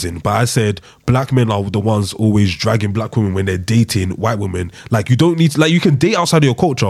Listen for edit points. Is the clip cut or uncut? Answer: uncut